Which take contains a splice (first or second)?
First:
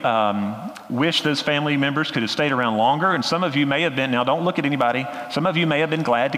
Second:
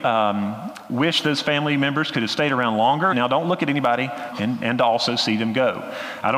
second